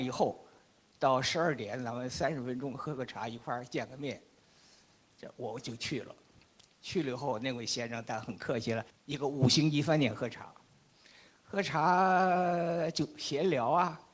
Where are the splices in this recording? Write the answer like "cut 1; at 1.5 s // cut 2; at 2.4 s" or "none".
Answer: cut 1; at 8.9 s